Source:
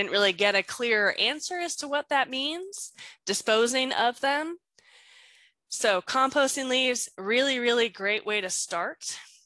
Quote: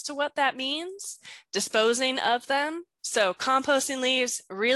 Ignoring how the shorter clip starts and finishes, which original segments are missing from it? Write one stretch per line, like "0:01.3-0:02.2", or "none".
0:04.7-0:05.6